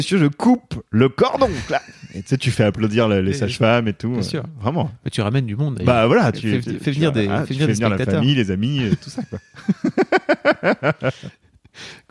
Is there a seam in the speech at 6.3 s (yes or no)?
yes